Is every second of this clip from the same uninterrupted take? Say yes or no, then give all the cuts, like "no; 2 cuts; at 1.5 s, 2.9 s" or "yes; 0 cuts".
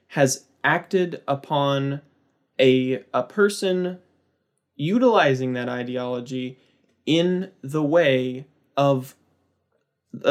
yes; 0 cuts